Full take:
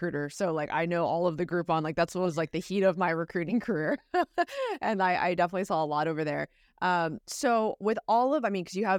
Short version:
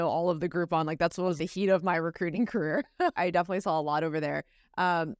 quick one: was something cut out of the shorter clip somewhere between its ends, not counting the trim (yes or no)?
yes